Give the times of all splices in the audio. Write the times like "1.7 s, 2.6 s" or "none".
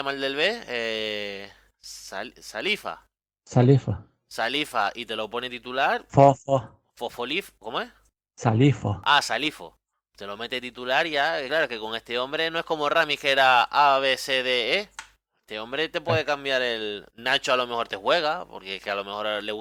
none